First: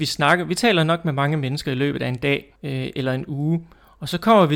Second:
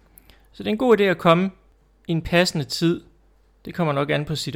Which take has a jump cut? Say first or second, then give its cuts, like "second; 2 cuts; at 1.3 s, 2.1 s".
first; 1 cut; at 2.6 s